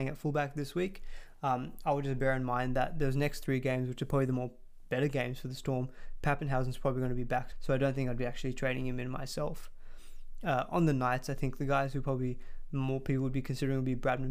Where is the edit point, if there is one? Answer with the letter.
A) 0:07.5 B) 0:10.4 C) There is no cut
A